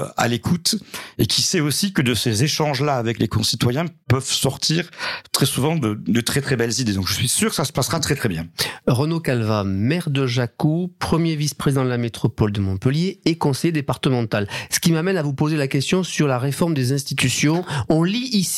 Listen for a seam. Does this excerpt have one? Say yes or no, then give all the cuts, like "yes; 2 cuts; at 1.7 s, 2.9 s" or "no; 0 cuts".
no; 0 cuts